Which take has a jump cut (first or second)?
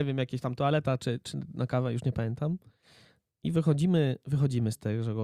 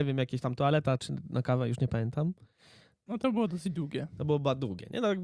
second